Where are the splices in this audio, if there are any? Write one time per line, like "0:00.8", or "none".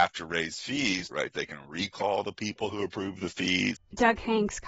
0:01.1
0:03.8